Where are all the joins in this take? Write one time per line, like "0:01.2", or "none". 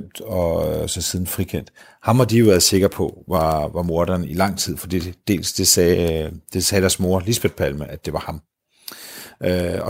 none